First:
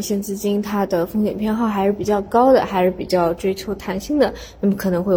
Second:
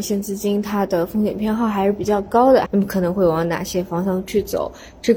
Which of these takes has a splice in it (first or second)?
second